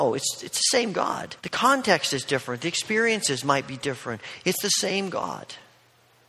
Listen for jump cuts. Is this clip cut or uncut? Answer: cut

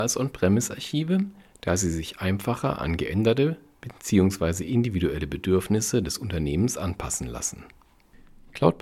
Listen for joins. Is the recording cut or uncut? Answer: uncut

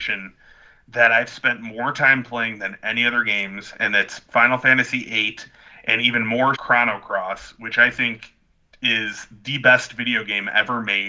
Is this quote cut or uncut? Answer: cut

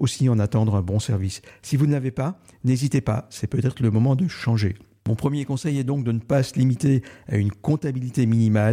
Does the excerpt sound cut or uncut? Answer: uncut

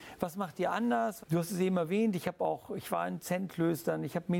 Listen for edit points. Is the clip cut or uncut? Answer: cut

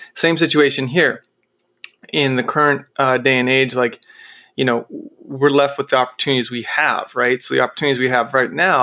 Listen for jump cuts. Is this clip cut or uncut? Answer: uncut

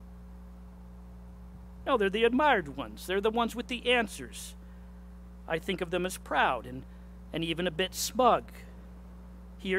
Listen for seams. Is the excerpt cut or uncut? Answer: uncut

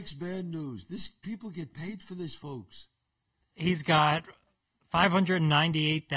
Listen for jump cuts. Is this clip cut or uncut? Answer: uncut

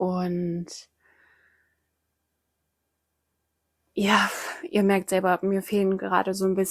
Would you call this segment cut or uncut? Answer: uncut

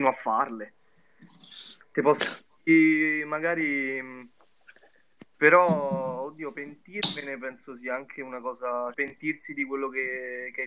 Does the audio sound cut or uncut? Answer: cut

